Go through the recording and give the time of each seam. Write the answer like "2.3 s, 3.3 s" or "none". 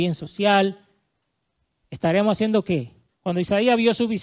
3.1 s